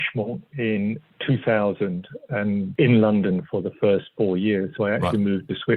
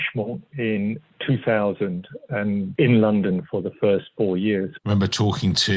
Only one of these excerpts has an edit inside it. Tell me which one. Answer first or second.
second